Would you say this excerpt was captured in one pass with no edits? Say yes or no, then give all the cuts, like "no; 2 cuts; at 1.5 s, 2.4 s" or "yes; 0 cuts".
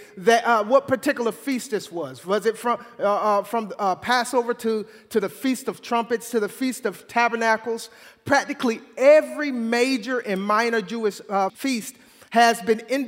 no; 1 cut; at 11.5 s